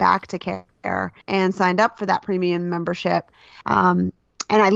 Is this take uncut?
no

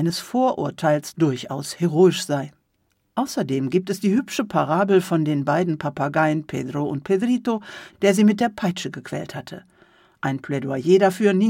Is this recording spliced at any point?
yes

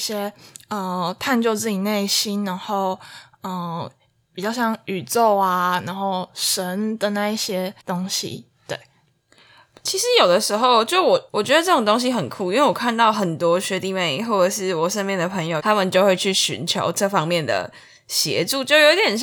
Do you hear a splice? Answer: yes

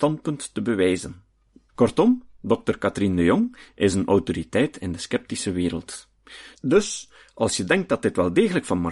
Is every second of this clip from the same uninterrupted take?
no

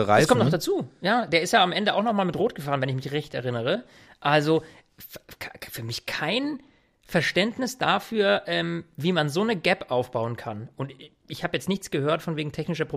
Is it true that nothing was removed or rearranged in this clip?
yes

